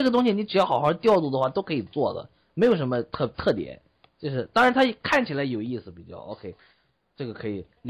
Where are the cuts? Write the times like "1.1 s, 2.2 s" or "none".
none